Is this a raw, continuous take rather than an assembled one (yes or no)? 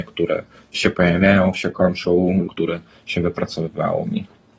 no